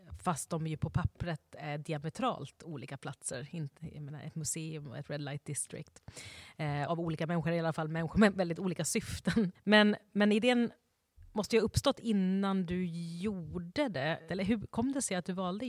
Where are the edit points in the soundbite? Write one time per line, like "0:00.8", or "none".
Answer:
0:06.9
0:14.3